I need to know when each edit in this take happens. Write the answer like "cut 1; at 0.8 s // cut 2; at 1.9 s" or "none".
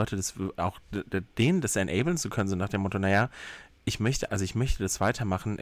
cut 1; at 4.3 s